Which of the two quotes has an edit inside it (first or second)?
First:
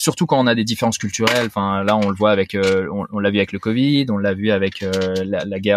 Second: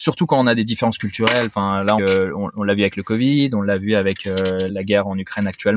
second